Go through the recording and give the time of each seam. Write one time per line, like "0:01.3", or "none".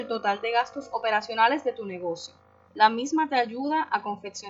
0:02.7